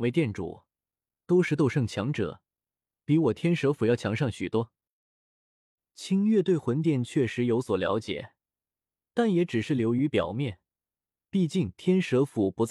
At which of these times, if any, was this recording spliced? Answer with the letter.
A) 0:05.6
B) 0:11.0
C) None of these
C